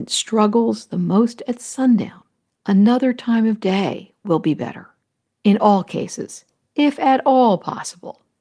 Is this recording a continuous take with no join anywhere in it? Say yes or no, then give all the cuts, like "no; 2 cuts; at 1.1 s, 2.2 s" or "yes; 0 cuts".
yes; 0 cuts